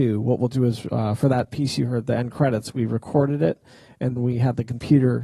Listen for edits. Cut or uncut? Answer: cut